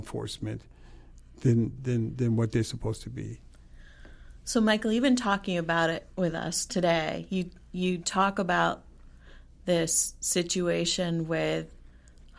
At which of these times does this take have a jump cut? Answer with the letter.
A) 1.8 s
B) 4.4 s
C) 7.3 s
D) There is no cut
A